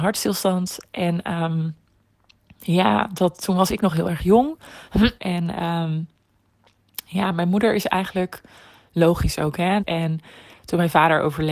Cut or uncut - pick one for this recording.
cut